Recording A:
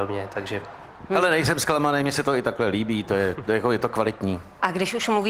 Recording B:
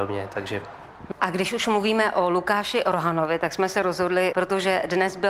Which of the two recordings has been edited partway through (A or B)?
B